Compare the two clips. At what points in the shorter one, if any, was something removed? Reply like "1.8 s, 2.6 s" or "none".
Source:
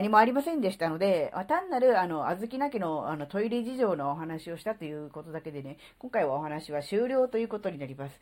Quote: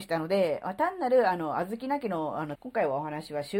2.6 s